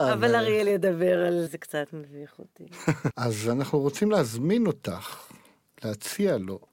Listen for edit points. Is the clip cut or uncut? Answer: cut